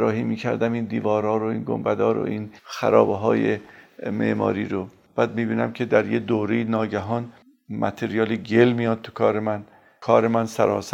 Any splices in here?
yes; 1 cut; at 2.6 s

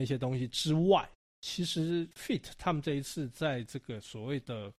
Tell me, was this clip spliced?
yes; 1 cut; at 2.1 s

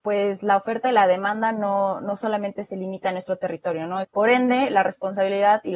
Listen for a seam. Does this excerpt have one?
yes; 1 cut; at 4.0 s

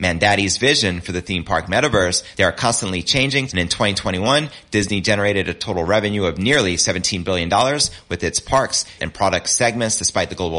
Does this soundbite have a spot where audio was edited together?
yes; 3 cuts; at 2.3 s, 3.5 s, 9.0 s

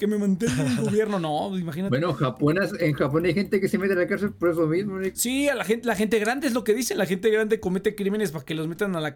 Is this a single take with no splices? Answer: yes; 0 cuts

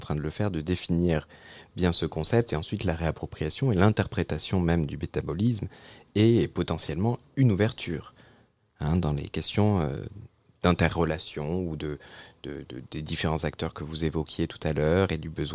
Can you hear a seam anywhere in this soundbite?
no; 0 cuts

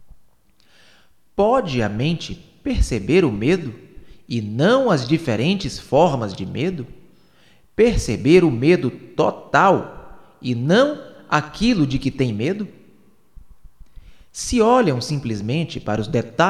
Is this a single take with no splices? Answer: yes; 0 cuts

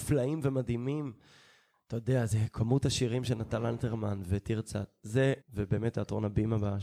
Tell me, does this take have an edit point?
yes; 1 cut; at 5.4 s

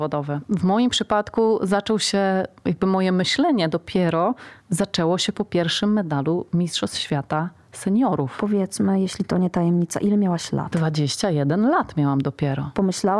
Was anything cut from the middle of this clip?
yes; 1 cut; at 4.6 s

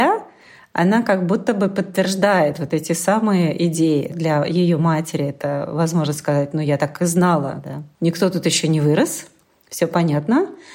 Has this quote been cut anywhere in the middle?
no; 0 cuts

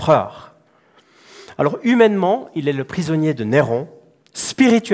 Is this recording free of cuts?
yes; 0 cuts

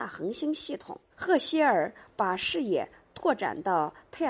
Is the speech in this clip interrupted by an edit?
yes; 1 cut; at 1.1 s

